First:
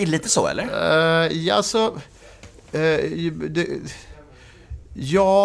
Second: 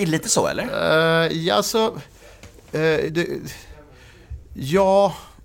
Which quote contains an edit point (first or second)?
second